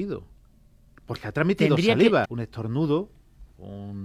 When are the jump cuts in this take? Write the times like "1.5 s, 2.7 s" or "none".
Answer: 2.2 s